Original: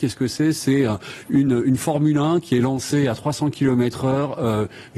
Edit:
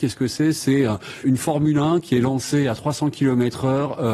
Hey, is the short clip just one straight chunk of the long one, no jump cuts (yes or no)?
no